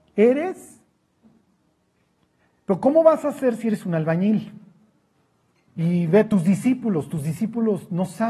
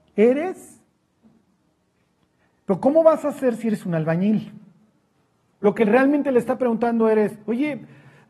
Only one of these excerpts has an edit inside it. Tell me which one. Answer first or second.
second